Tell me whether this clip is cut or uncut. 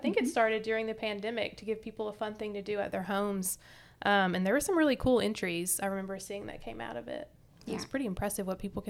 uncut